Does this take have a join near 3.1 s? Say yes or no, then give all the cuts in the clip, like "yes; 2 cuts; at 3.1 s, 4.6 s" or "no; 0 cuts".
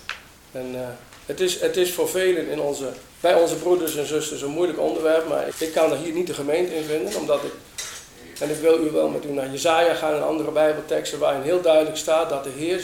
yes; 2 cuts; at 3.1 s, 5.5 s